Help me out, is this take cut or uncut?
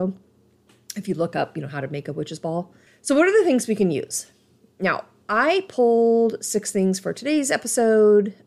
uncut